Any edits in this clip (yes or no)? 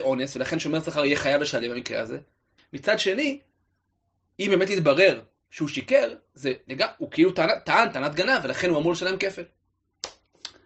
yes